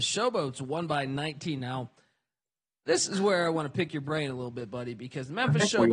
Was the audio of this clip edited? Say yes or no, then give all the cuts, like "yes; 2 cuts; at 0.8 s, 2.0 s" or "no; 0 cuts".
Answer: no; 0 cuts